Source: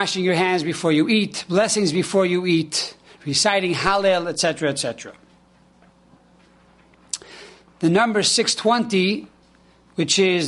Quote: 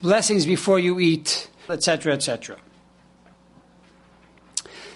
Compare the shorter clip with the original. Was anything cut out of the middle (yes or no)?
yes